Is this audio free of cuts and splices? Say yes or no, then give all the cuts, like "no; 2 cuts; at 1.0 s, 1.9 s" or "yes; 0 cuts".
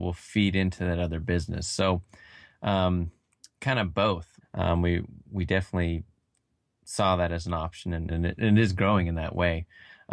no; 2 cuts; at 4.4 s, 8.1 s